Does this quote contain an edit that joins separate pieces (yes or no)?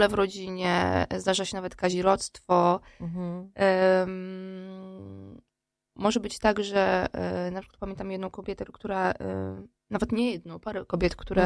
yes